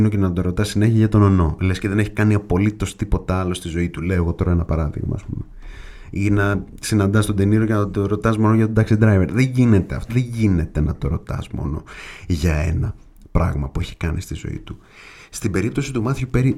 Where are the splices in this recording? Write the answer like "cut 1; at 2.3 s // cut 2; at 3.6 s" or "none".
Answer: cut 1; at 10.1 s